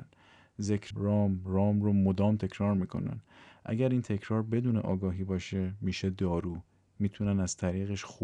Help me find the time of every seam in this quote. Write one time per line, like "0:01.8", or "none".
0:00.9